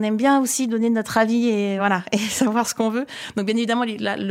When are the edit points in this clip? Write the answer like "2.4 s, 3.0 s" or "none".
none